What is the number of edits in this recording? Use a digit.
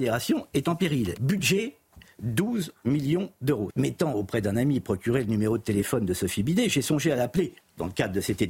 2